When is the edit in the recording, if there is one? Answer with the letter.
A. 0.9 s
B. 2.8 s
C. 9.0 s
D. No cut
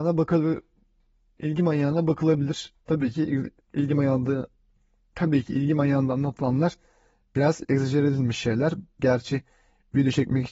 C